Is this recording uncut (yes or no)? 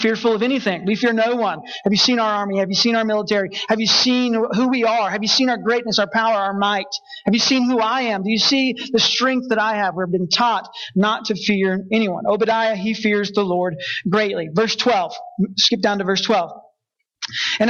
yes